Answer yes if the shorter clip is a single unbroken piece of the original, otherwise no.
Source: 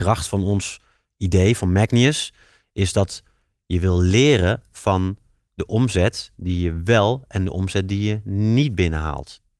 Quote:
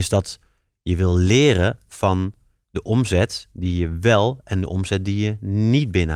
yes